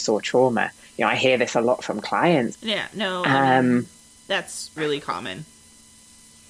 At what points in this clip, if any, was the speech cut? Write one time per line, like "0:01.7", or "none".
0:02.5
0:04.8

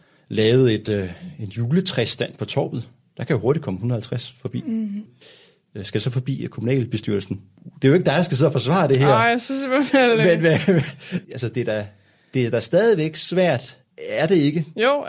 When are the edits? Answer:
none

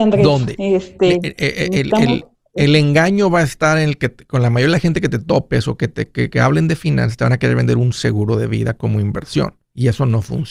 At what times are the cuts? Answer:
none

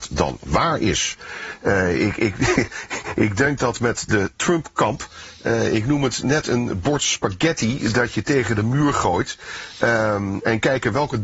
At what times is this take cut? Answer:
none

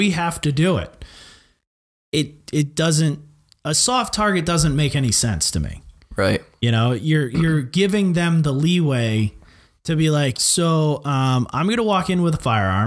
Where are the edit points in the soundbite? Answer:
0:10.3

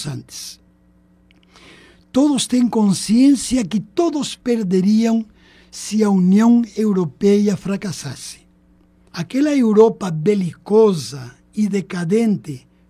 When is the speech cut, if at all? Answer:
0:09.1

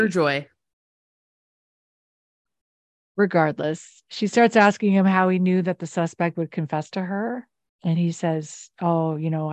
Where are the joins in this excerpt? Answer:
none

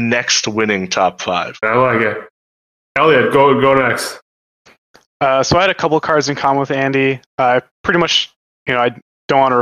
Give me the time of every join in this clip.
0:01.6

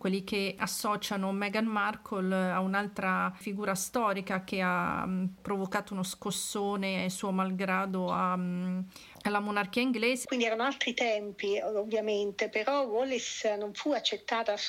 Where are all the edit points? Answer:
0:10.2

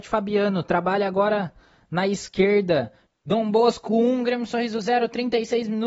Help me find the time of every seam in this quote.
0:03.1

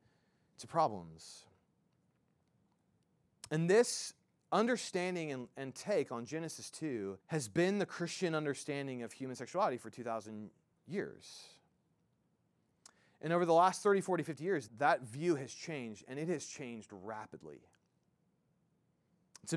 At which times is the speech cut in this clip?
0:07.2
0:14.7

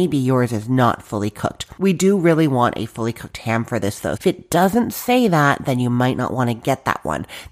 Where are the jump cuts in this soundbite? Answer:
0:04.2

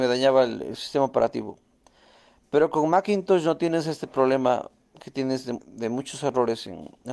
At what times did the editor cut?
0:05.6

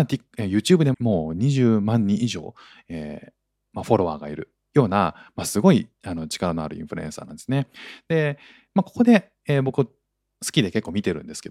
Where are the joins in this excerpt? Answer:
0:00.9

